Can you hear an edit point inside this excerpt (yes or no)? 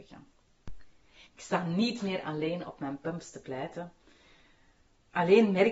yes